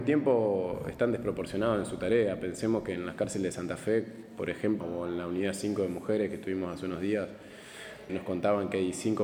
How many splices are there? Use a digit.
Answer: 2